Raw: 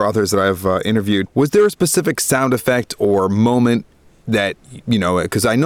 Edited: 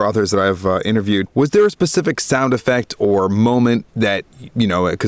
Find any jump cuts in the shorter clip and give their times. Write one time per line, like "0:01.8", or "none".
0:03.9